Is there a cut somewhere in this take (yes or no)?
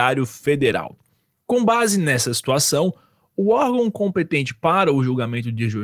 no